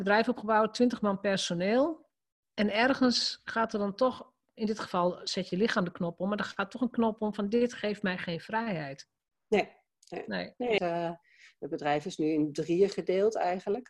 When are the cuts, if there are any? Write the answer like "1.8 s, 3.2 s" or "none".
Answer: 10.8 s